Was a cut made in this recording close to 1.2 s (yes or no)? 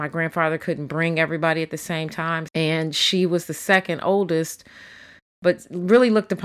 no